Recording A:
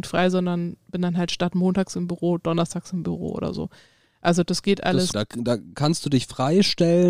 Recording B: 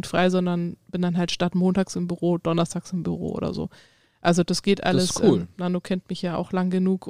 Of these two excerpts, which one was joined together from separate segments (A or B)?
A